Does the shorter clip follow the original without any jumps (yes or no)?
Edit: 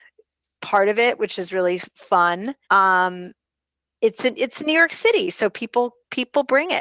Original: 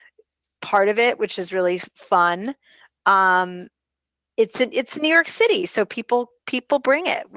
no